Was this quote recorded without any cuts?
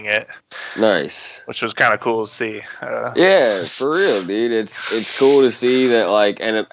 yes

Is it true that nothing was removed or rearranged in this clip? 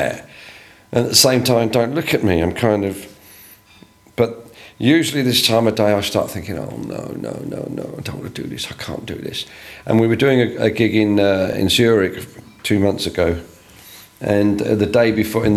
yes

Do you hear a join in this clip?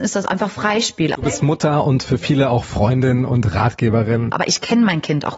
yes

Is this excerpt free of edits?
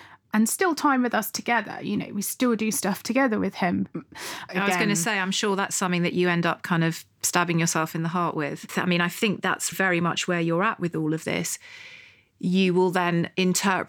no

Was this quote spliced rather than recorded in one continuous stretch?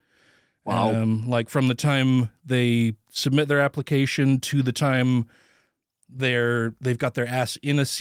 no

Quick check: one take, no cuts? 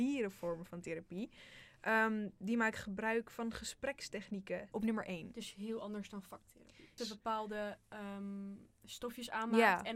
no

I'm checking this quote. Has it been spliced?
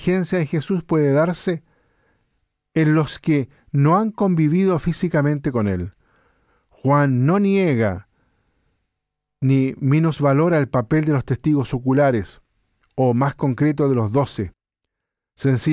no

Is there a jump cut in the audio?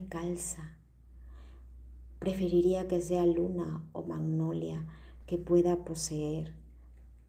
yes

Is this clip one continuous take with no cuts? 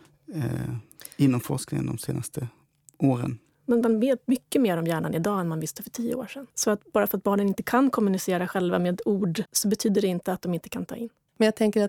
no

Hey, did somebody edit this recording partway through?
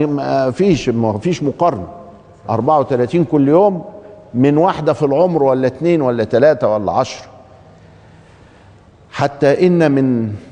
no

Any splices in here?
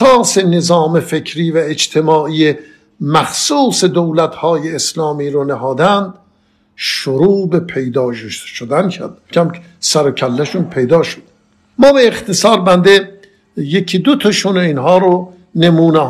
yes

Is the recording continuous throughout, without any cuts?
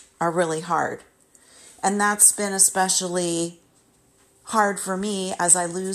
yes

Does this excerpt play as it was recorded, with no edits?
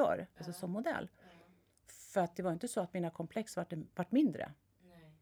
yes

